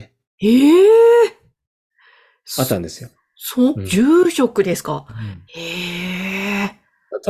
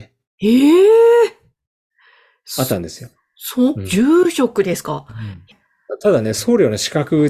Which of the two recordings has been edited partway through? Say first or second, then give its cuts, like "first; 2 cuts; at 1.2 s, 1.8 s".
second; 1 cut; at 5.5 s